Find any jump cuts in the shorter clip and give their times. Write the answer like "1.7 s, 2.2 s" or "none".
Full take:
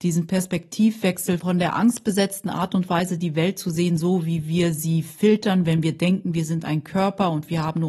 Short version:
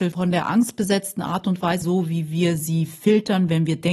1.8 s